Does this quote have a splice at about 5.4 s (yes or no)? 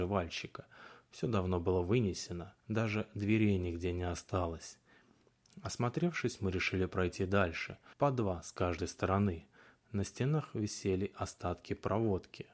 no